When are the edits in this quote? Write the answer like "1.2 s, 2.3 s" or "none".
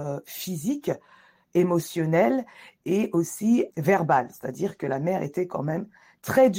3.7 s